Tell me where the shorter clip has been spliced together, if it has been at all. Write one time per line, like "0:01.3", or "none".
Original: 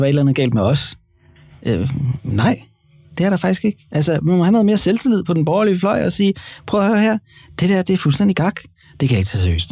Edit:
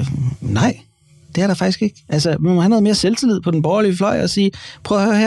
none